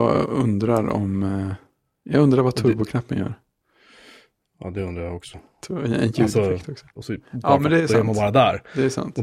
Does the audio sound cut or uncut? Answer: cut